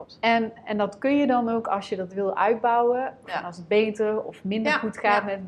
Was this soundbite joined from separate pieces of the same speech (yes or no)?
yes